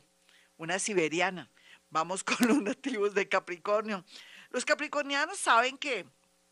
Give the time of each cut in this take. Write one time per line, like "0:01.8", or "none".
none